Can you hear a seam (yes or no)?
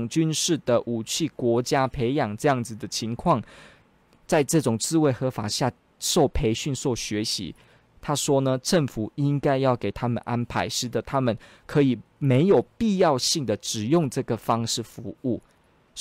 yes